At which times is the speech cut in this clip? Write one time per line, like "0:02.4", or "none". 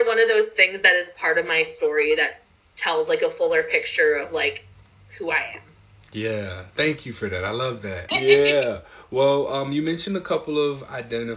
0:08.1